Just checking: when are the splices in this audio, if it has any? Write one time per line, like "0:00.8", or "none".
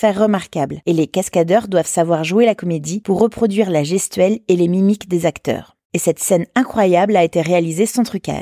0:05.8